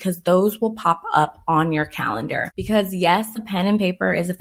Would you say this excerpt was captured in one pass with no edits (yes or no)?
yes